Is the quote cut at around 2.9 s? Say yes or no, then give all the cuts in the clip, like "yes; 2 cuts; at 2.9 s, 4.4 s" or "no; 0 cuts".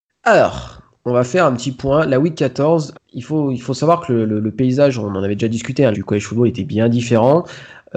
yes; 2 cuts; at 2.9 s, 5.9 s